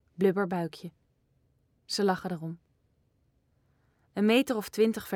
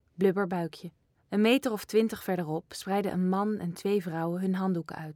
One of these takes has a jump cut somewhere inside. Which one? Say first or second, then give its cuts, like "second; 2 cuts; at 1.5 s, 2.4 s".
second; 1 cut; at 1.1 s